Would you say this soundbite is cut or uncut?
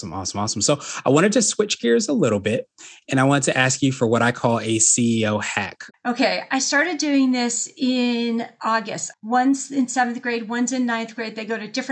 cut